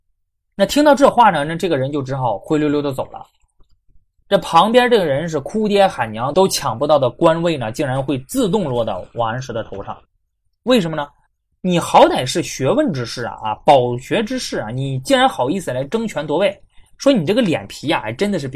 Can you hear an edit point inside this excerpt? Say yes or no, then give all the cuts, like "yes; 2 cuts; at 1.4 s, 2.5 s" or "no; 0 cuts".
yes; 1 cut; at 11.5 s